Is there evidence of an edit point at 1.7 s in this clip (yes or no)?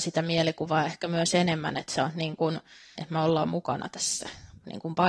no